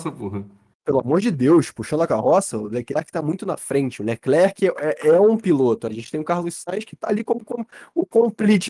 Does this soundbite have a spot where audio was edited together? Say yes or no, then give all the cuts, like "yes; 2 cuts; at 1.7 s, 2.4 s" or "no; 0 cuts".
no; 0 cuts